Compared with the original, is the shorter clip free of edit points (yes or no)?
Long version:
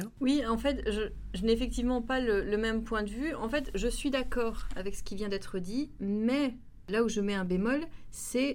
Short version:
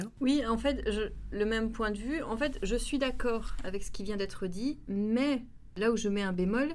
no